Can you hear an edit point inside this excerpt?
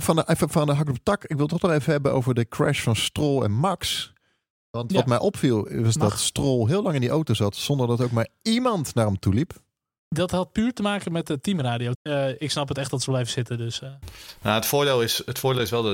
yes; 1 cut; at 11.9 s

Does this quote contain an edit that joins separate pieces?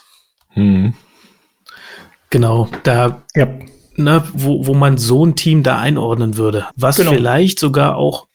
yes; 2 cuts; at 4.3 s, 6.7 s

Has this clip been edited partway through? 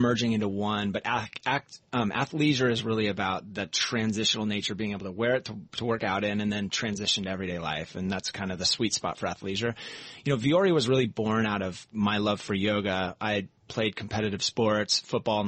no; 0 cuts

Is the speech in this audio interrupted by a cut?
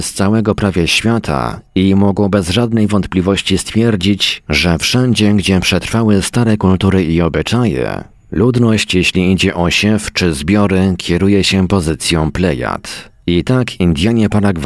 yes; 1 cut; at 13.2 s

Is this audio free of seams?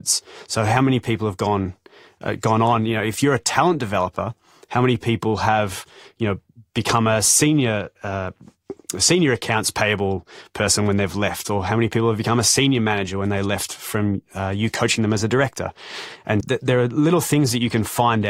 no; 1 cut; at 16.4 s

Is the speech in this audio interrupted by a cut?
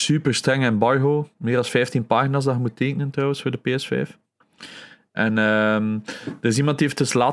no; 0 cuts

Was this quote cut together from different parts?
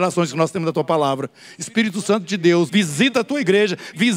yes; 1 cut; at 2.7 s

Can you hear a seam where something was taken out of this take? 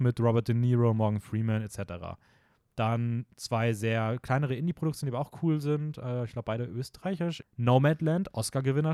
yes; 1 cut; at 7.4 s

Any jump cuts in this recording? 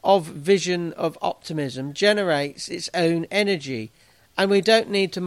no; 0 cuts

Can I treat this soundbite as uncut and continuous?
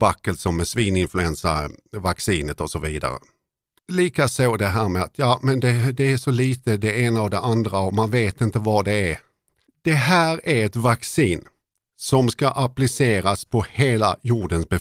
no; 1 cut; at 3.8 s

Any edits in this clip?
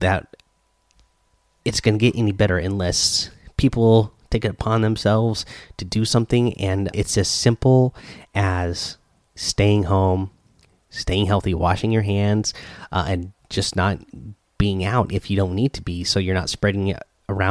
yes; 1 cut; at 6.9 s

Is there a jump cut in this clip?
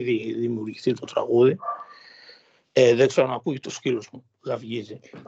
no; 0 cuts

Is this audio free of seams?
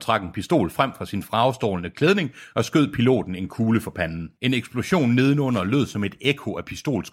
no; 1 cut; at 4.4 s

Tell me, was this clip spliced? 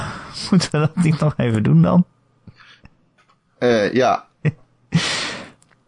yes; 1 cut; at 4.3 s

